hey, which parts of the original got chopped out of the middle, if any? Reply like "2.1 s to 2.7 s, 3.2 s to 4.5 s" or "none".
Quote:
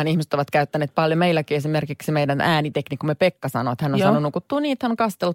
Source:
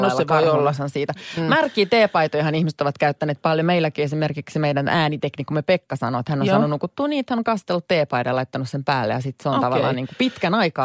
none